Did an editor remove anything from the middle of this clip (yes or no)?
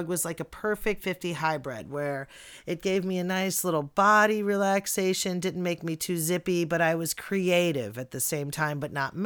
yes